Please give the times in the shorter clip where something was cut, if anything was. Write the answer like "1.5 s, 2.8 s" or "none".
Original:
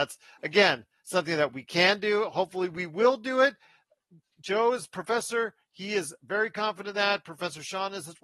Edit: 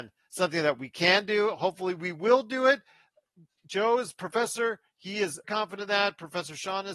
5.4 s